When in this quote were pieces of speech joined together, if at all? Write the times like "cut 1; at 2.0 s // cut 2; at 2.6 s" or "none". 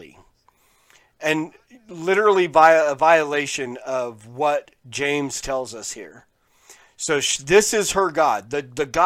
none